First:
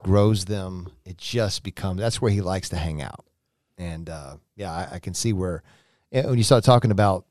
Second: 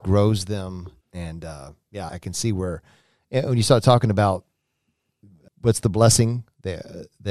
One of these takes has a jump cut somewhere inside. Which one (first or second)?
second